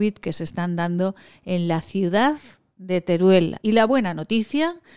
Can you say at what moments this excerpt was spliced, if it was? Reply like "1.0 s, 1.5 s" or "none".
3.6 s